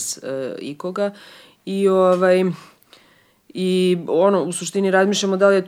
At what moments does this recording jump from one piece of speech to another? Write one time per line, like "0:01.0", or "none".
none